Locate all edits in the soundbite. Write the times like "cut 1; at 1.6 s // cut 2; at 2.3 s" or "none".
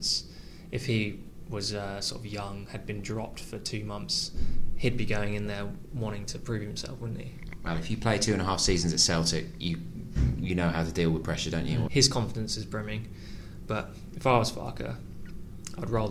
cut 1; at 11.9 s // cut 2; at 13.7 s